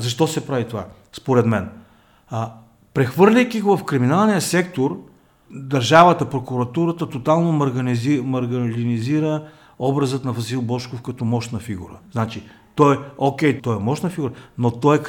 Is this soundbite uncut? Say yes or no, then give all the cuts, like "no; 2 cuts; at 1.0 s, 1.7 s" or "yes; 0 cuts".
no; 1 cut; at 13.6 s